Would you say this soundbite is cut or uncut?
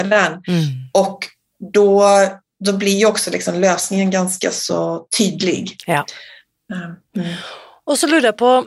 uncut